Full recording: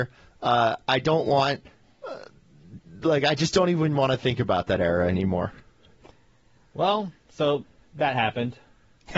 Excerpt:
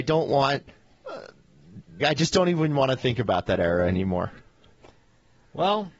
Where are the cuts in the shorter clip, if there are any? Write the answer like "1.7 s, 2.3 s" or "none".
2.0 s